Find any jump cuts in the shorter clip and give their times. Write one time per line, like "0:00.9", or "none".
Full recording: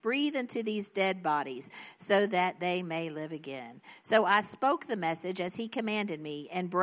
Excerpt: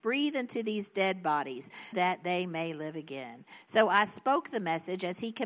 0:01.9

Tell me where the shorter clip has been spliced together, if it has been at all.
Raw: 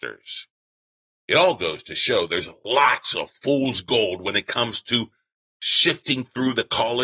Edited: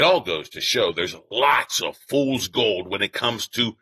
none

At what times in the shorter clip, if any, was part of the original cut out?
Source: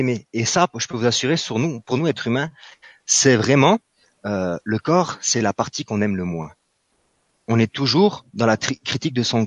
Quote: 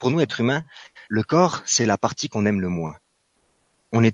0:01.1

